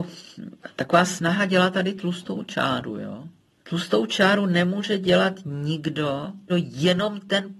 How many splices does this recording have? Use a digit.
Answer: 1